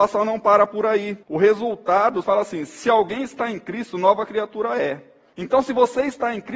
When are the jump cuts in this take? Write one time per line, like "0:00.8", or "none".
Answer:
0:01.2
0:02.2
0:05.3